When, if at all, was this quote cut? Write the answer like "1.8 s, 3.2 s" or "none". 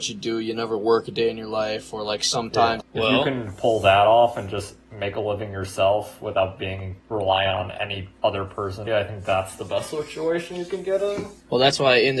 2.8 s, 7.0 s, 8.9 s